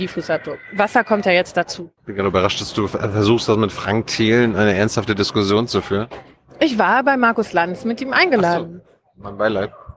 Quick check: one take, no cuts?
no; 1 cut; at 2.0 s

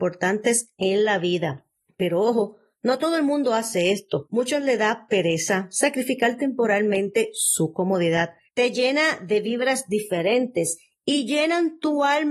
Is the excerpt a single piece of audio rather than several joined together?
no; 1 cut; at 8.5 s

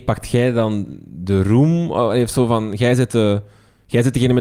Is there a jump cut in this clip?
no; 0 cuts

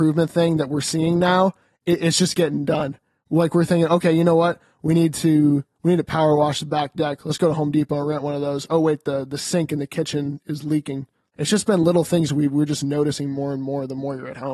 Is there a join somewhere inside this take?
yes; 1 cut; at 11.3 s

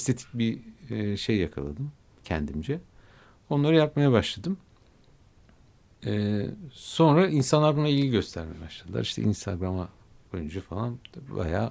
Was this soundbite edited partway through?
no; 0 cuts

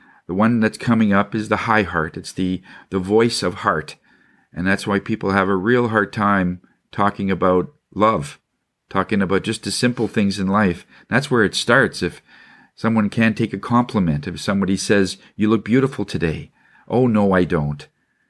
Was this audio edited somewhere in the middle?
no; 0 cuts

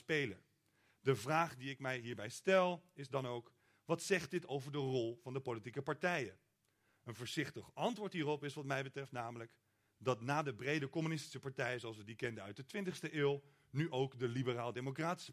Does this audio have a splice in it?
no; 0 cuts

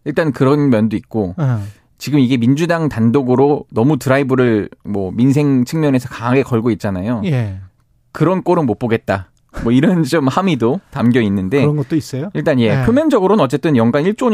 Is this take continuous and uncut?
yes; 0 cuts

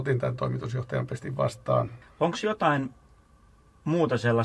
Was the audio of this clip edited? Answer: yes; 1 cut; at 2.0 s

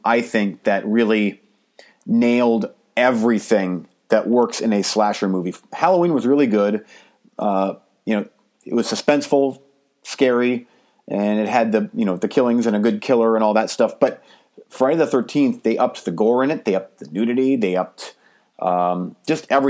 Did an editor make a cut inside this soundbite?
no; 0 cuts

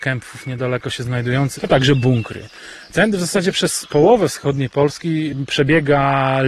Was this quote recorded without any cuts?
no; 1 cut; at 1.6 s

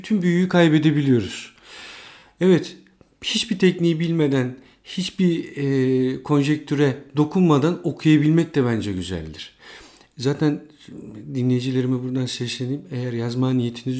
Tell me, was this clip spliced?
no; 0 cuts

